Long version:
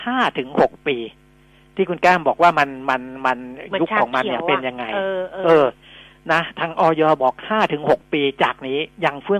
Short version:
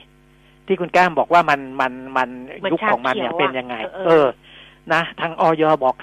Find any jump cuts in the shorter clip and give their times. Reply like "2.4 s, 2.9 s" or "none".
3.8 s